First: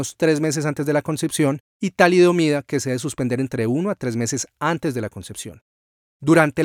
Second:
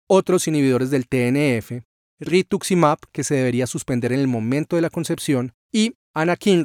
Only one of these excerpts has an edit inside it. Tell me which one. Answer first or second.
second